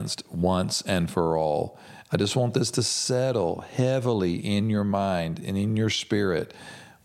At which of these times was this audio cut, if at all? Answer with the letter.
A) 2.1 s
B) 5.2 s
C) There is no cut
C